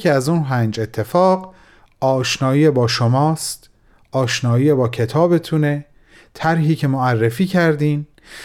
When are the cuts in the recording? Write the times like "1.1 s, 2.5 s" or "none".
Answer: none

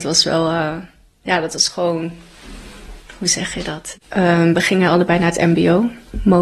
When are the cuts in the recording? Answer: 3.9 s

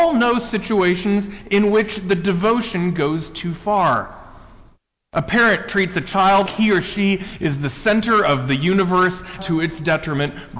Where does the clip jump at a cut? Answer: 6.5 s, 9.4 s

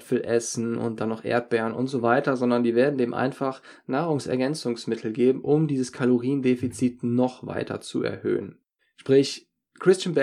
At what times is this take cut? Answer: 8.8 s

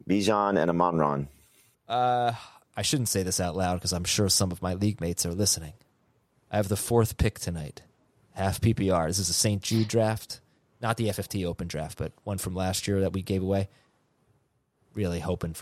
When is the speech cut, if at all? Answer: 1.7 s

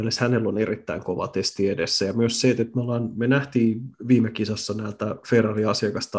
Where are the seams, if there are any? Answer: none

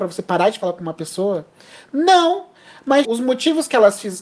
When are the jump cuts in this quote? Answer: 3.0 s

